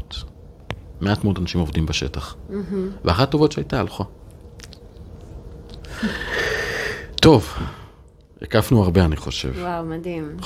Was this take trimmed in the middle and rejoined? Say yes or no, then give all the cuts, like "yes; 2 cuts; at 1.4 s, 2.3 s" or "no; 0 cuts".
no; 0 cuts